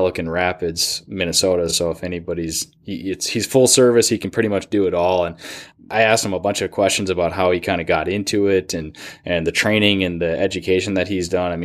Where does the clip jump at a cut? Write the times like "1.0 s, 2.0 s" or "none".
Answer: none